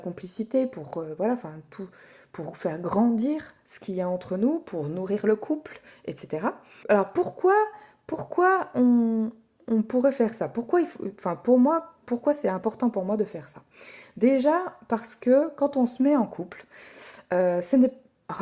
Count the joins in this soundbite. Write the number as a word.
one